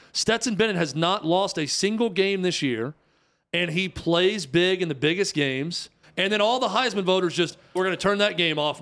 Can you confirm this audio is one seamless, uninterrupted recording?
no; 2 cuts; at 6.0 s, 7.8 s

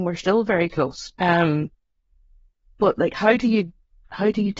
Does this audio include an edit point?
yes; 1 cut; at 1.1 s

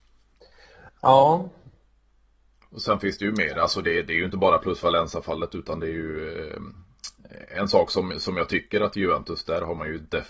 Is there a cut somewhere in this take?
no; 0 cuts

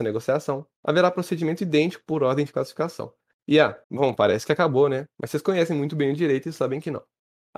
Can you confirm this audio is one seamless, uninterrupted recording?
no; 1 cut; at 3.8 s

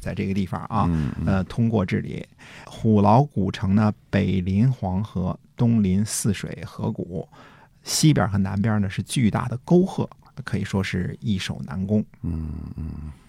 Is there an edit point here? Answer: no; 0 cuts

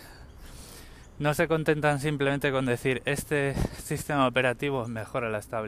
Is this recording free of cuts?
yes; 0 cuts

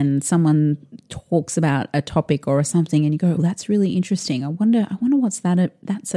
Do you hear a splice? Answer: yes; 1 cut; at 3.4 s

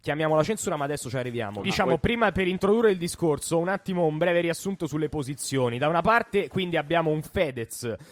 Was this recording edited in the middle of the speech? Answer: yes; 1 cut; at 1.6 s

